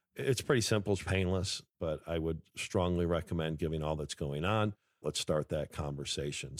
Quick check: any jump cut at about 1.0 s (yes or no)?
yes